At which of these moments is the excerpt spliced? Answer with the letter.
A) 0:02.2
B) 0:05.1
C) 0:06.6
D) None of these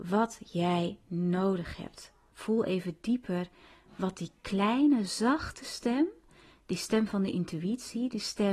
D